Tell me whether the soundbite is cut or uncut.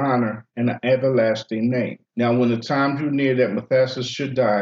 cut